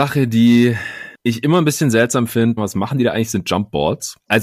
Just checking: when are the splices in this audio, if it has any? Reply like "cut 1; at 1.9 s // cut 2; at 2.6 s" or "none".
cut 1; at 2.6 s